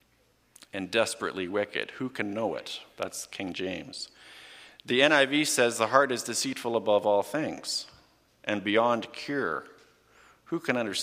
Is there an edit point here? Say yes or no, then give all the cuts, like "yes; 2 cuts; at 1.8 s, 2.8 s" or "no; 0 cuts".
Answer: no; 0 cuts